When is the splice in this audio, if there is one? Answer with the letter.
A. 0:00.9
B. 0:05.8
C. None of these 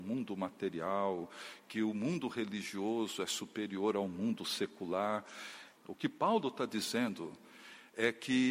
B